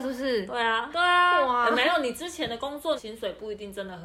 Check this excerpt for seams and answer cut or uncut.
cut